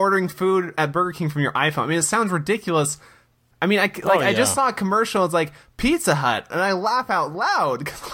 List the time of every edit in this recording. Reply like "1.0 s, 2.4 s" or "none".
3.5 s, 6.5 s